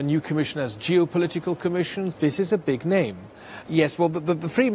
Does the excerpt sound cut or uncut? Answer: cut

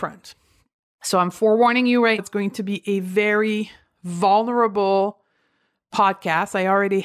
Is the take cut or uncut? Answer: cut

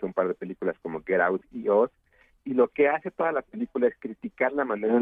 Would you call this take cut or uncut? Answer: uncut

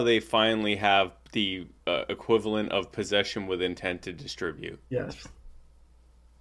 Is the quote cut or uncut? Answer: uncut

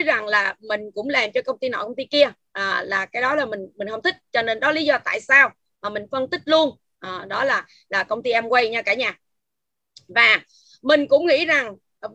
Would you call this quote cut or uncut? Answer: uncut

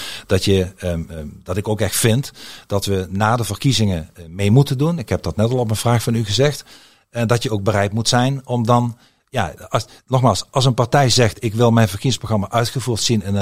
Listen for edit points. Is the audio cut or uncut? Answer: uncut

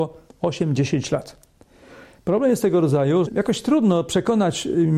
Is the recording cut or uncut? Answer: cut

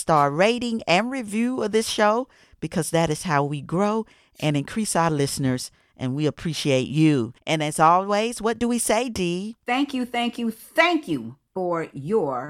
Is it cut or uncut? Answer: uncut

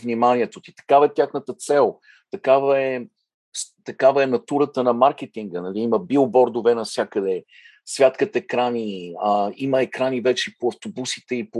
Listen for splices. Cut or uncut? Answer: uncut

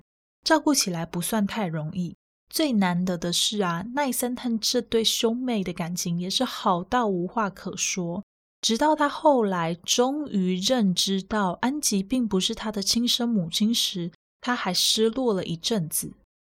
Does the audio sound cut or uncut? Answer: cut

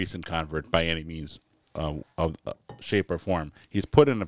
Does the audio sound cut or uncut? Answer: uncut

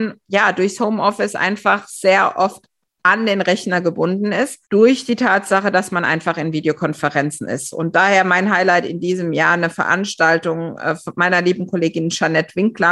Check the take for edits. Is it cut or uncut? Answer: uncut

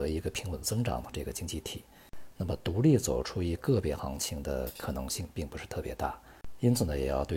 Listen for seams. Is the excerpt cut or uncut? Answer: cut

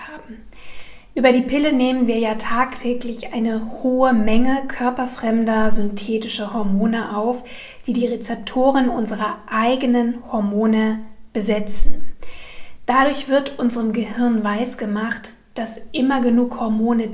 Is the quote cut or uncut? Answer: uncut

